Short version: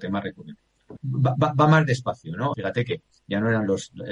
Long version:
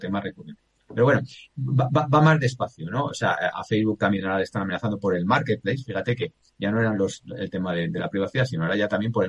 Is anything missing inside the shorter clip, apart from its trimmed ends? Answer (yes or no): yes